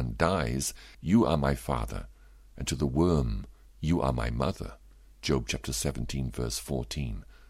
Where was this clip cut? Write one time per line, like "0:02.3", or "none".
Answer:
0:00.9